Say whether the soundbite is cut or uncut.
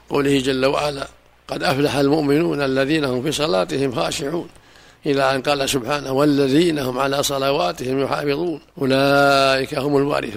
cut